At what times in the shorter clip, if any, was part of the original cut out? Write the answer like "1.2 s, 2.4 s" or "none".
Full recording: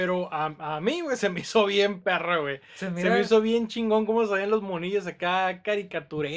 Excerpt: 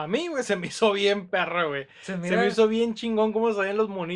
none